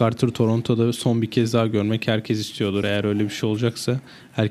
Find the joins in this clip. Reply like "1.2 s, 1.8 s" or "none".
none